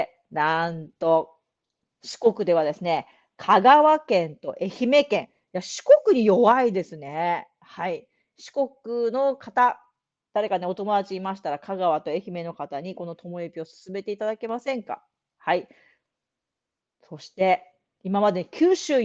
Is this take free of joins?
yes; 0 cuts

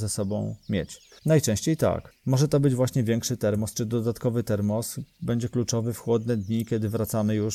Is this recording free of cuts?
no; 1 cut; at 1.2 s

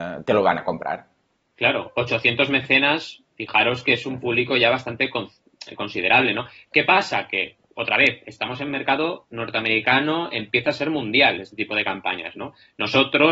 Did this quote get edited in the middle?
no; 0 cuts

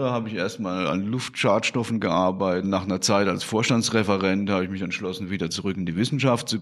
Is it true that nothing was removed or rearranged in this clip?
no; 1 cut; at 2.6 s

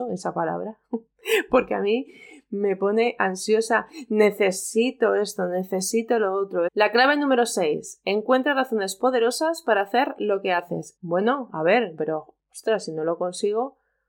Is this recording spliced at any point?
yes; 3 cuts; at 6.7 s, 11.0 s, 12.0 s

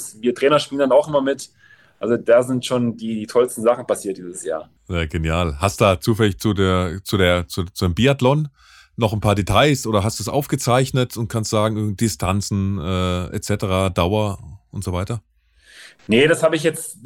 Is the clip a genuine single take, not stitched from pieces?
no; 1 cut; at 4.8 s

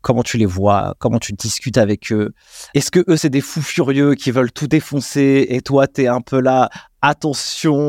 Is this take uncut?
yes; 0 cuts

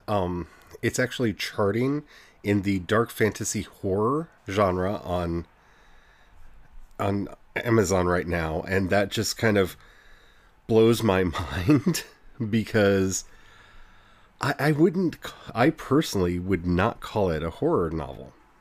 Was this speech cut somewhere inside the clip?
yes; 1 cut; at 4.4 s

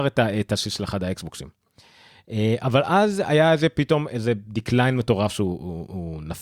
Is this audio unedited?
yes; 0 cuts

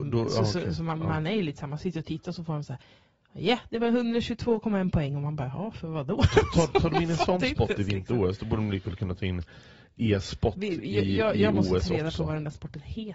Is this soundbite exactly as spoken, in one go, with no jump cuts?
yes; 0 cuts

